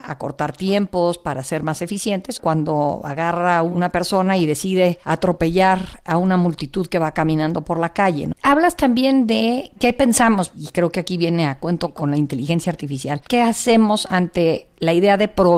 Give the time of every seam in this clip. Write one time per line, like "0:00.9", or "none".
0:02.4
0:08.3